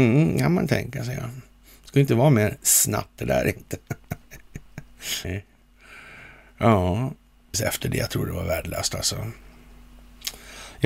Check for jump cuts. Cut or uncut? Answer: cut